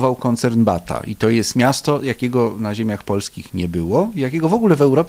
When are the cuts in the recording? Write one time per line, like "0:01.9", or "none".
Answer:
none